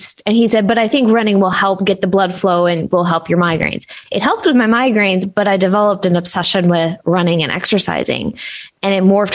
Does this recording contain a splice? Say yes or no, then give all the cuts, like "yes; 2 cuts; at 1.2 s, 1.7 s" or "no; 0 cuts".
no; 0 cuts